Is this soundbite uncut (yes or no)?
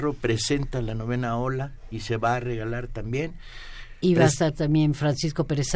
yes